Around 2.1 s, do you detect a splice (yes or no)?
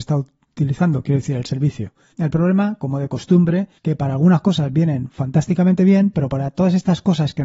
yes